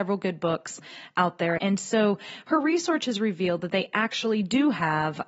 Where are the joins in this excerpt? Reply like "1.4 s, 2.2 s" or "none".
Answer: 1.6 s